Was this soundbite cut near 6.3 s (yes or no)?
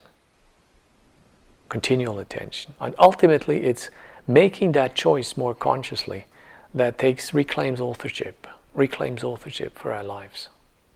no